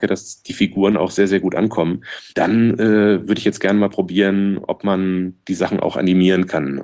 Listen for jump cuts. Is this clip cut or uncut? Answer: cut